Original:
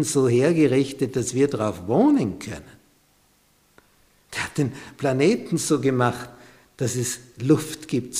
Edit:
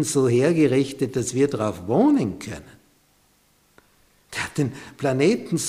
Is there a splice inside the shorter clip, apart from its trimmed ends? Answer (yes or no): no